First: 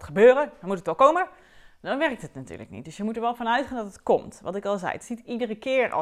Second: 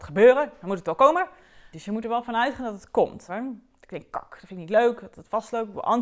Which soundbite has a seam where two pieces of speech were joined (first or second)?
second